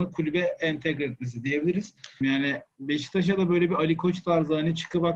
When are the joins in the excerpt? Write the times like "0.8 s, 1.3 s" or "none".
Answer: 2.2 s